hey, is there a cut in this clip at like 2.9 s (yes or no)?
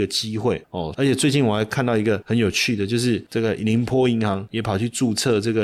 no